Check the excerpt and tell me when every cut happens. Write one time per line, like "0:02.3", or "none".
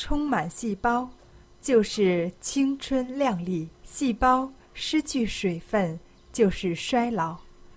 0:03.7